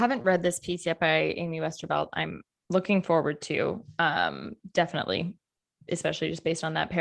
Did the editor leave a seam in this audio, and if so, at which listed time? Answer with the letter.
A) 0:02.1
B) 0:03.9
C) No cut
C